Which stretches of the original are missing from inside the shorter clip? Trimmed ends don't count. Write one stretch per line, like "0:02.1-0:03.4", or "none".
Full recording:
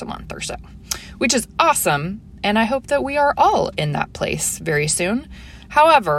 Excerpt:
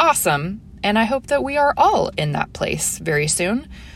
none